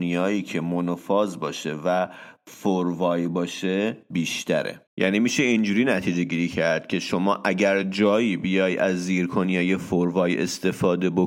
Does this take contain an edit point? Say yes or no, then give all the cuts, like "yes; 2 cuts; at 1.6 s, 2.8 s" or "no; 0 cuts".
yes; 1 cut; at 4.9 s